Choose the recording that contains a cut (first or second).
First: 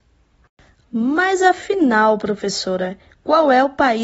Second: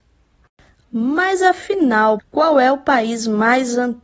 second